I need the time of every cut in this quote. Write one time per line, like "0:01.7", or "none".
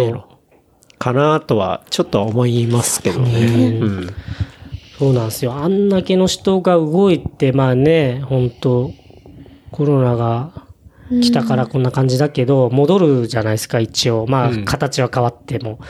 none